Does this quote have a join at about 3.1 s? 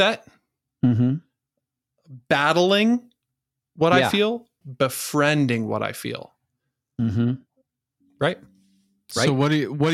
no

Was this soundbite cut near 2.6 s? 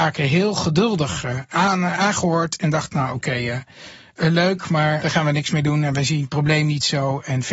no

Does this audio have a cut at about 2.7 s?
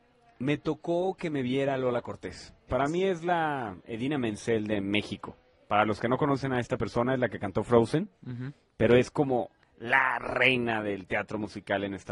yes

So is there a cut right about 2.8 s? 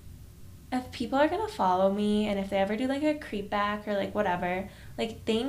no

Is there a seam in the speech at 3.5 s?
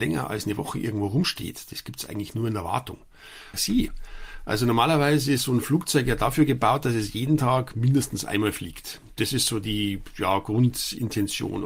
yes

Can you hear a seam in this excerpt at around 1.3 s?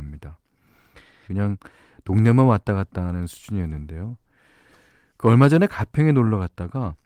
yes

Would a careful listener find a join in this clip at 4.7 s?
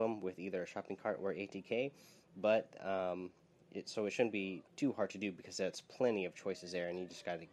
yes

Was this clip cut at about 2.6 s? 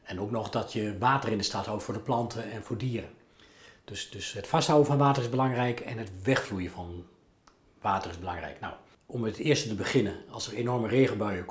yes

